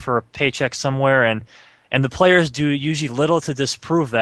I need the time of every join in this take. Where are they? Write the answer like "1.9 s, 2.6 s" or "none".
none